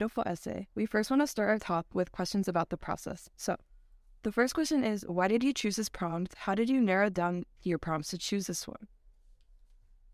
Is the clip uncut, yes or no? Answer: no